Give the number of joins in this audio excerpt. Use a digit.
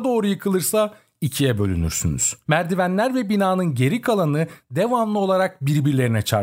1